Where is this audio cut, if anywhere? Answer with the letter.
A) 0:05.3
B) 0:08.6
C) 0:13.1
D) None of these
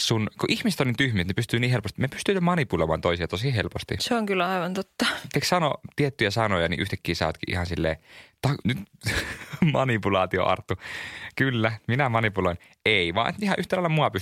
B